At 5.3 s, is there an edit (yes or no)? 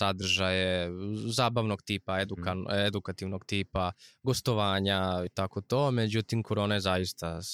yes